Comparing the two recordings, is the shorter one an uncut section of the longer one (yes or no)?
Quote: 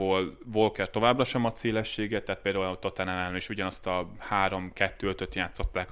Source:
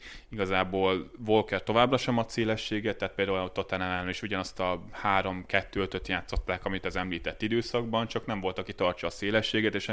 yes